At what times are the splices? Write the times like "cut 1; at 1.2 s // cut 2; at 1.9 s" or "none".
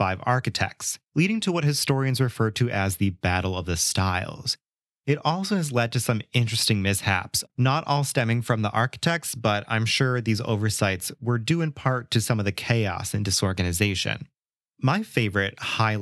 cut 1; at 1.1 s

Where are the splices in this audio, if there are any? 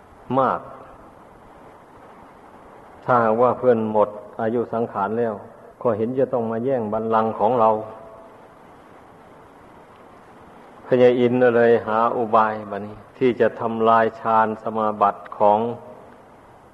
cut 1; at 5.7 s // cut 2; at 13.1 s

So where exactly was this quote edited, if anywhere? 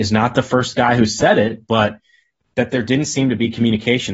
none

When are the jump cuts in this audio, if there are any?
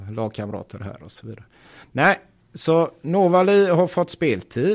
none

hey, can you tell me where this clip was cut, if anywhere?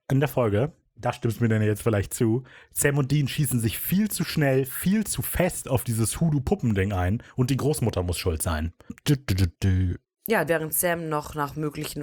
cut 1; at 8.9 s // cut 2; at 10.5 s

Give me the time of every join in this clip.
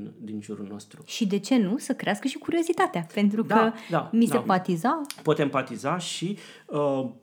cut 1; at 4.4 s

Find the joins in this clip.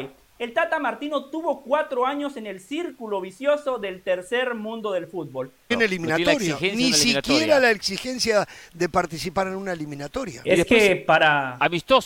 cut 1; at 5.7 s

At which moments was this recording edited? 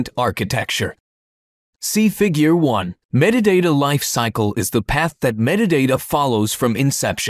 cut 1; at 1.7 s // cut 2; at 3.0 s

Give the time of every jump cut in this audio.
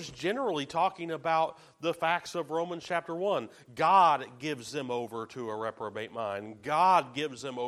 none

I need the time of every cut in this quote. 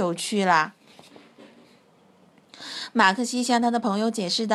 none

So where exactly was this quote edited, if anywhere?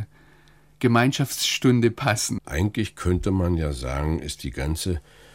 cut 1; at 2.4 s

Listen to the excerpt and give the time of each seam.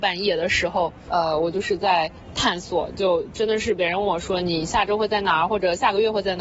cut 1; at 1.1 s

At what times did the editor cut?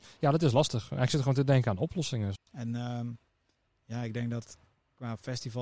cut 1; at 2.4 s

